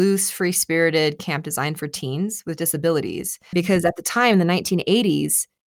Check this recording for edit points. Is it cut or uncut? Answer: cut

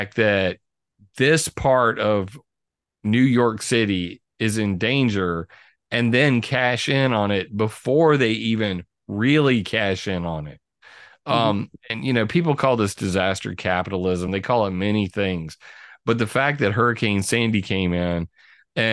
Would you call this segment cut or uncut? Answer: uncut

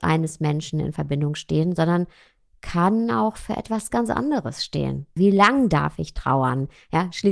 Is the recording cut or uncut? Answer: cut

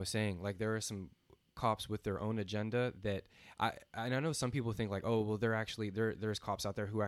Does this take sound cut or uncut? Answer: uncut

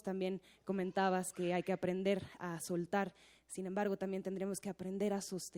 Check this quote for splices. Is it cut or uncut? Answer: uncut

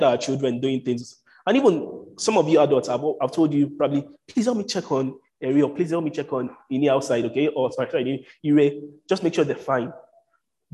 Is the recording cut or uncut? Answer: uncut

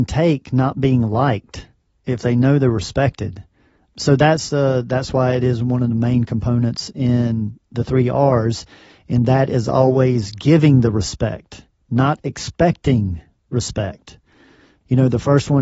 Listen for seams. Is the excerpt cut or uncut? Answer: uncut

